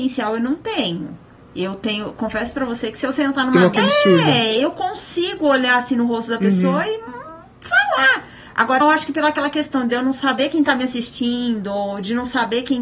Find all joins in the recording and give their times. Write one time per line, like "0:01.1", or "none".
0:03.8
0:08.8